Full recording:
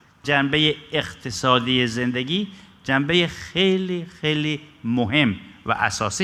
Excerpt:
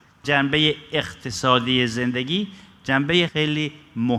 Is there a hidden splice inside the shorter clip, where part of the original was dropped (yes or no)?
yes